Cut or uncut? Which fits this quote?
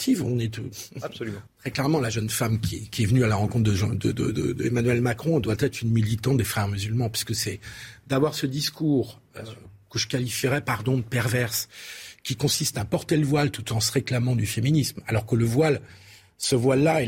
cut